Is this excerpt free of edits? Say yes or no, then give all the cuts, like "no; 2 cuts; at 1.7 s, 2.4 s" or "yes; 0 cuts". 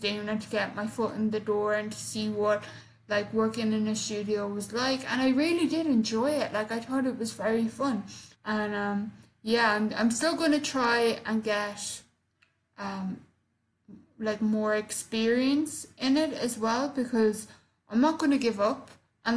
no; 1 cut; at 8.3 s